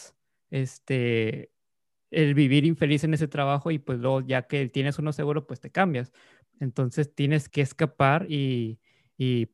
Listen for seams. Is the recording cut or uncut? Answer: cut